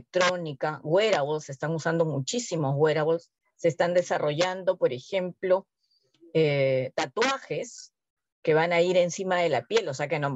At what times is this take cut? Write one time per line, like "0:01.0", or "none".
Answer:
0:03.4